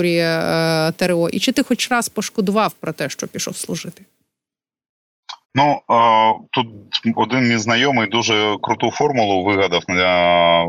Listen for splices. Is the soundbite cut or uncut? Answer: cut